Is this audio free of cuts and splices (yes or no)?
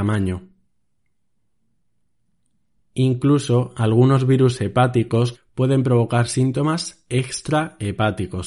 no